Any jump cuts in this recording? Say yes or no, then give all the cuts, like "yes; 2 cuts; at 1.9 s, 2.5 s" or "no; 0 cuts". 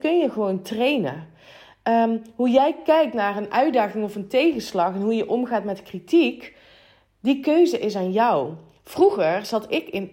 no; 0 cuts